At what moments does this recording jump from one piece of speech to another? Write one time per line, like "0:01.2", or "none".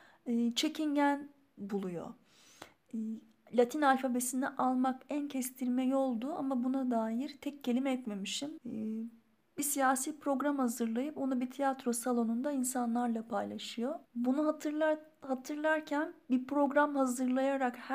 0:08.6
0:14.0